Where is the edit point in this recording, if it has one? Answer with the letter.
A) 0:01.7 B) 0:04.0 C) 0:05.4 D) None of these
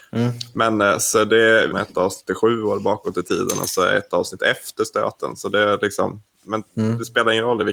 A